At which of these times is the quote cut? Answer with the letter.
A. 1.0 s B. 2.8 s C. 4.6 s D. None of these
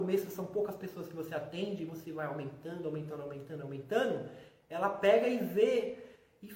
D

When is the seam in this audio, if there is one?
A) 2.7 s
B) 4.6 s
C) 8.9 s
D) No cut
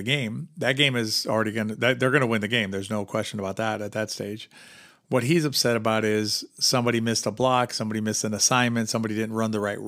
D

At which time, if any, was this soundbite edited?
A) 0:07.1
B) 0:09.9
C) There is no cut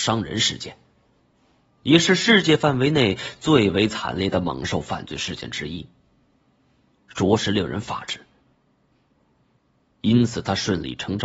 A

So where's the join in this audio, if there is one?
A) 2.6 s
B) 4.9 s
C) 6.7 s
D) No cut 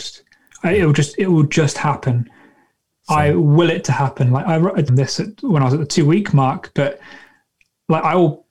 B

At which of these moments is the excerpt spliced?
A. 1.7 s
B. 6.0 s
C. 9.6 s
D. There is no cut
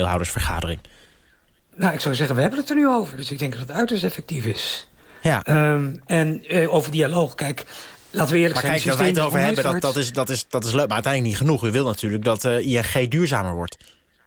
C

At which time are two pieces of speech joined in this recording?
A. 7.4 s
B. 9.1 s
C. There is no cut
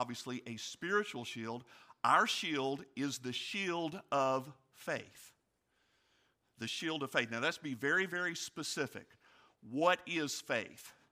C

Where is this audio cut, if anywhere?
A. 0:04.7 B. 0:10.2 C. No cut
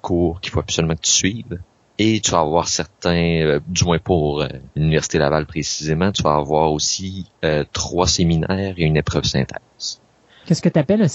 A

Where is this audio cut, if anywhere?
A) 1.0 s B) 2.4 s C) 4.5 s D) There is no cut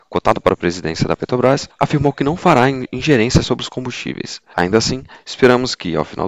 C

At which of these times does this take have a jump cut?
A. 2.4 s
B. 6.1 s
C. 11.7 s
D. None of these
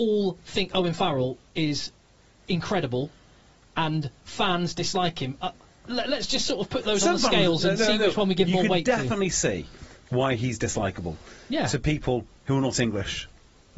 D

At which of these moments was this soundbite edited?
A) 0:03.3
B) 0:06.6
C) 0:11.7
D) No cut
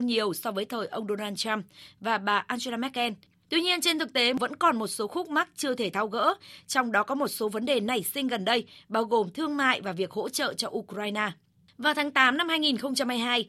D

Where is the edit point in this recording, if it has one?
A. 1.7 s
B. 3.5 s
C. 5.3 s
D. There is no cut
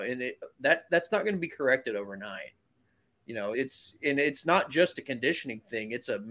B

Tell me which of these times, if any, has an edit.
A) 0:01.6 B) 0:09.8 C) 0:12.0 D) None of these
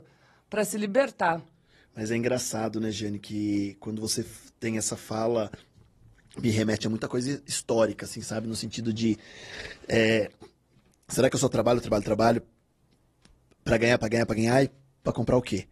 D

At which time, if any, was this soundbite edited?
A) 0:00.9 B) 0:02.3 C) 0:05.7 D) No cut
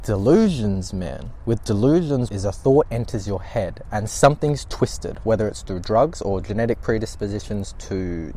B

